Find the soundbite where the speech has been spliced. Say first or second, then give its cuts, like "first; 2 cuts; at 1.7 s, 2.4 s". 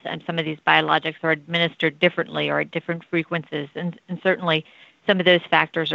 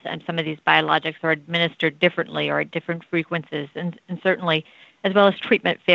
second; 1 cut; at 5.0 s